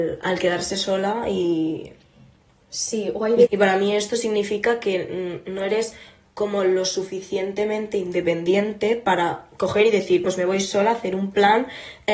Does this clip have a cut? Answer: yes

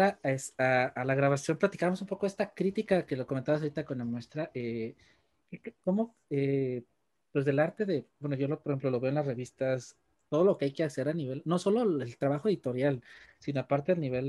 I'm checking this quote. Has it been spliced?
no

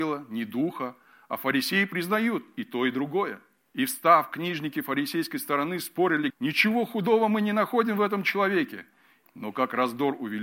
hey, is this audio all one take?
no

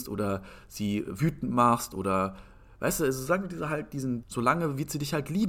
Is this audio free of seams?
no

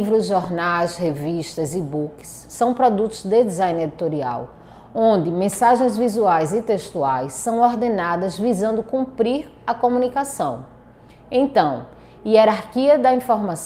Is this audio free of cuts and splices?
yes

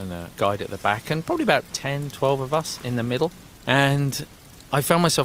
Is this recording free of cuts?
no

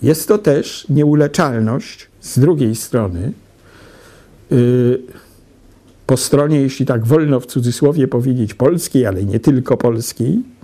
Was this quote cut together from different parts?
yes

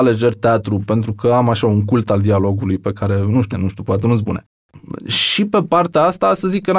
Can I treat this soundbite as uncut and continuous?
no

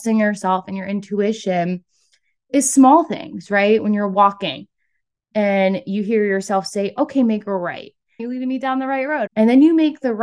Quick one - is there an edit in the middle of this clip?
yes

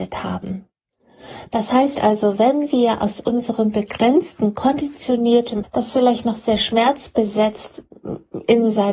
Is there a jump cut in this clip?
yes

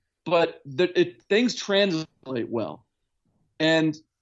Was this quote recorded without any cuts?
yes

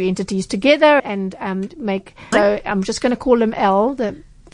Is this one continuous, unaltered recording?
no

